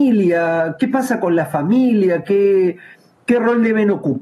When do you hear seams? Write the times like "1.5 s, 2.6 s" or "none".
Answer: none